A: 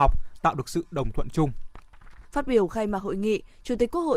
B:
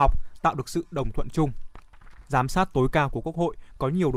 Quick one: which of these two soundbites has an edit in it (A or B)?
A